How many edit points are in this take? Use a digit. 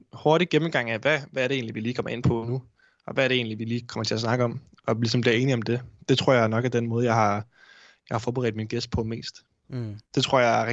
1